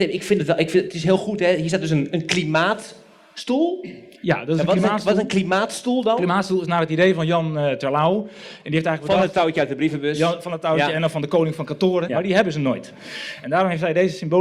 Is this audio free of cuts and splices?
no; 1 cut; at 12.1 s

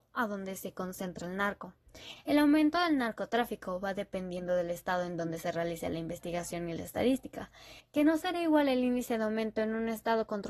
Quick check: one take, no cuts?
no; 2 cuts; at 2.2 s, 7.8 s

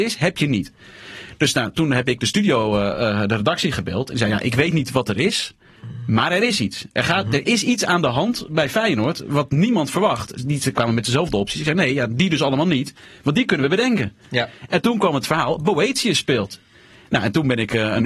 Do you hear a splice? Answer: no; 0 cuts

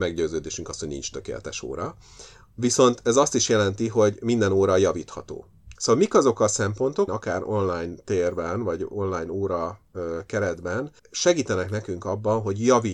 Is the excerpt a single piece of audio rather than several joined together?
no; 3 cuts; at 5.7 s, 7.1 s, 11.0 s

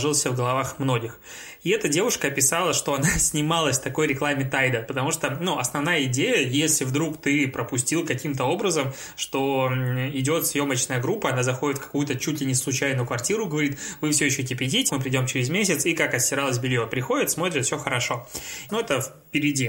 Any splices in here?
yes; 2 cuts; at 14.9 s, 18.7 s

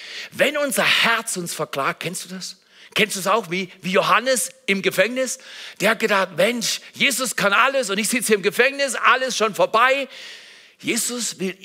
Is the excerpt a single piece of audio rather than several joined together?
yes; 0 cuts

